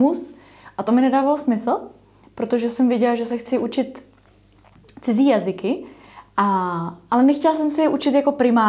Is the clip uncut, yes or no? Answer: yes